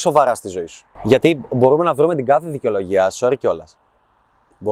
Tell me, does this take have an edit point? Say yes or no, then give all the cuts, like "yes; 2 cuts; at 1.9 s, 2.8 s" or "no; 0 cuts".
no; 0 cuts